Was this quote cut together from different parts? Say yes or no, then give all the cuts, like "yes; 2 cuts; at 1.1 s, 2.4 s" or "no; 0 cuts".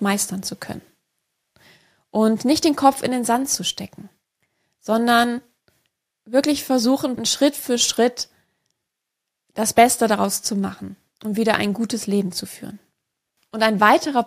yes; 1 cut; at 7.2 s